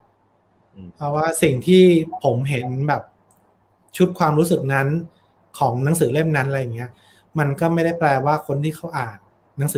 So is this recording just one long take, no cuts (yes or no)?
yes